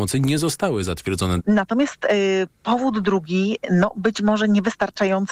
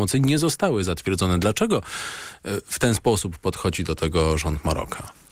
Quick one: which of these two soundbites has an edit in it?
first; 1 cut; at 1.4 s

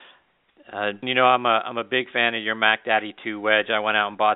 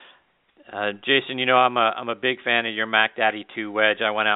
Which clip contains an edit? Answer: first; 1 cut; at 1.0 s

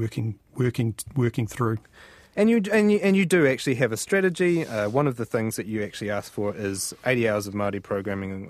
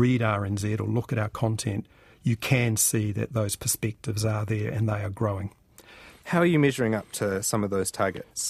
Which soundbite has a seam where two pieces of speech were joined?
second; 1 cut; at 6.2 s

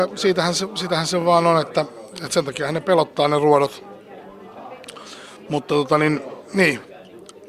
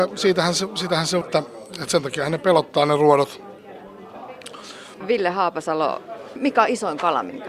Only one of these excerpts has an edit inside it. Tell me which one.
second; 2 cuts; at 1.2 s, 5.0 s

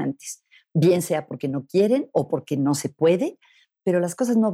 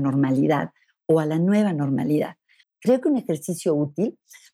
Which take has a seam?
second; 1 cut; at 2.6 s

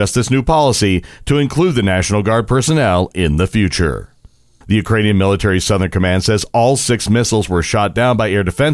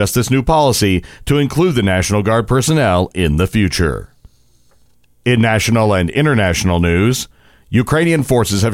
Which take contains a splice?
first; 1 cut; at 4.6 s

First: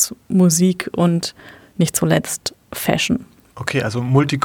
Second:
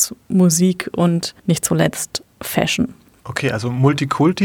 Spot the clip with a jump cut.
second; 1 cut; at 1.4 s

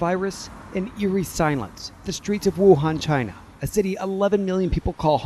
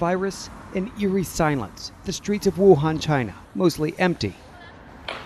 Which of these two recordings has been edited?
second; 1 cut; at 3.4 s

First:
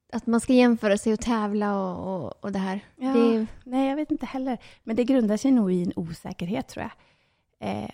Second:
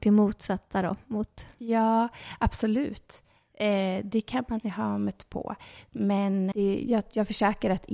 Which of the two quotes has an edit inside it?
second; 1 cut; at 6.5 s

